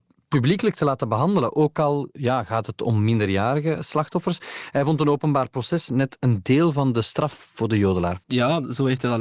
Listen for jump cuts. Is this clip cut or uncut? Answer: cut